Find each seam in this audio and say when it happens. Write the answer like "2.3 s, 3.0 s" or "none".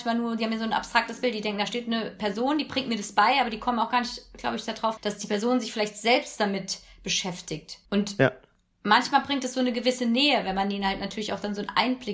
5.0 s, 7.9 s